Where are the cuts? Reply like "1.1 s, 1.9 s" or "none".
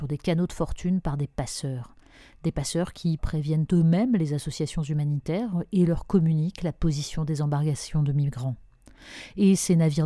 3.2 s